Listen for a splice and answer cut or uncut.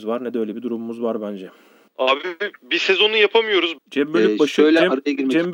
cut